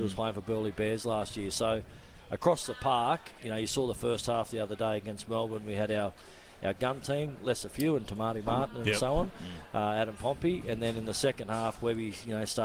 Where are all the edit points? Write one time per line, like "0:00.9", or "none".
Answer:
0:03.4